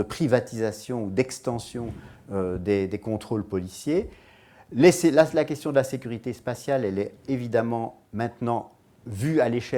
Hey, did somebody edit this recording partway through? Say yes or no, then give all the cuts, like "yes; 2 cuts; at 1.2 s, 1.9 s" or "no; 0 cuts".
no; 0 cuts